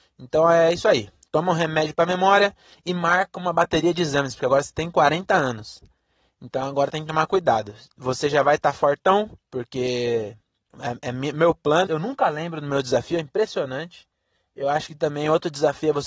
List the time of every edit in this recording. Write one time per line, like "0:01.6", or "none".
0:09.4
0:11.9